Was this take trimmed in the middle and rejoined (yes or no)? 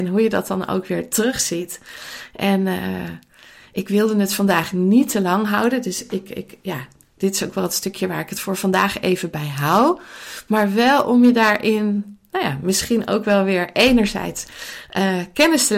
no